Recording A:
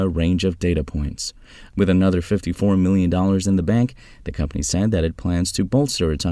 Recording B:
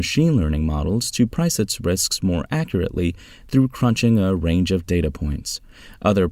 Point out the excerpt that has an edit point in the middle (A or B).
A